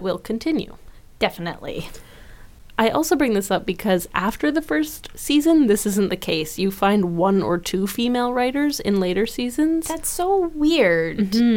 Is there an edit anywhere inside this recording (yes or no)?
no